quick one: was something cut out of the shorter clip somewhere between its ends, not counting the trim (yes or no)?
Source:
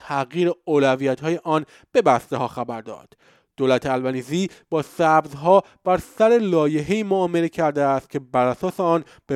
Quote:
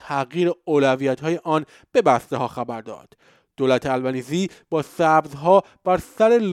no